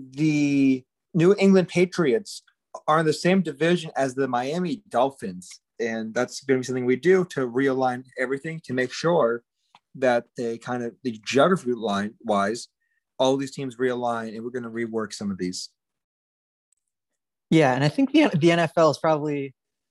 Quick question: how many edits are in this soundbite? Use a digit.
1